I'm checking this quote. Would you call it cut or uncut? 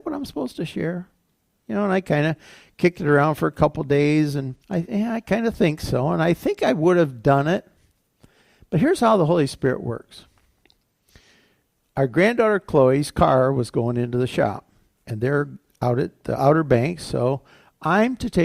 cut